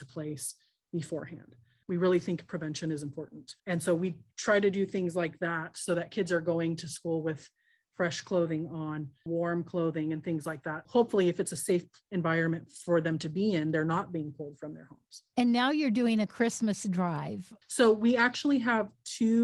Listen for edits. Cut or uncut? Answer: cut